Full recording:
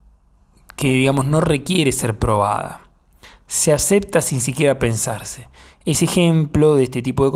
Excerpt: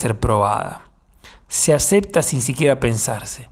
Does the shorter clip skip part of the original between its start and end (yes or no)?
no